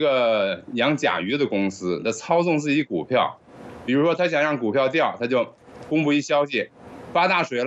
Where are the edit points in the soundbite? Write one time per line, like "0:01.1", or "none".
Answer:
none